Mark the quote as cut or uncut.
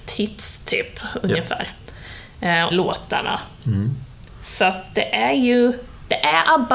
cut